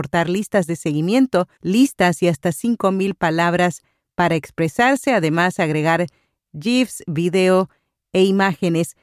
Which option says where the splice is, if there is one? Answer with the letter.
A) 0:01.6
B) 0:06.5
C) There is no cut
A